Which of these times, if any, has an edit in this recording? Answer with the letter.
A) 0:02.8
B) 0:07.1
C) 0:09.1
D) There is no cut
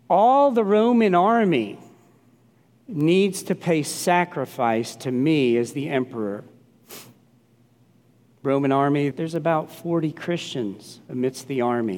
C